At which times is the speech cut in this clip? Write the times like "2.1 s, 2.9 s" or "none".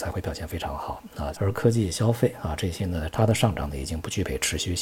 1.3 s, 3.1 s

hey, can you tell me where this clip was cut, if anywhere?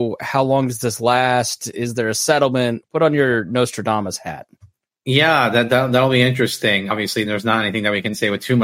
none

